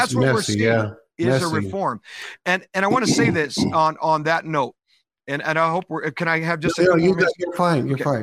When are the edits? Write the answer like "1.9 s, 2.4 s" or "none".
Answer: none